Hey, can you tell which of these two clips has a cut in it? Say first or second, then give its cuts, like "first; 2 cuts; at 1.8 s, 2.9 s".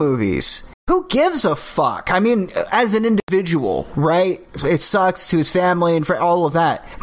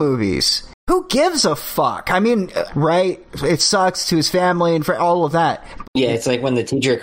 second; 2 cuts; at 2.7 s, 5.8 s